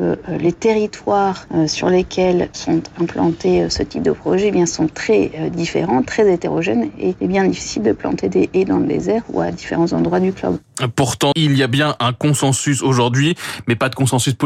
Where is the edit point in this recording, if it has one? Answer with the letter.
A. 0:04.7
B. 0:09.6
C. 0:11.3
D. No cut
C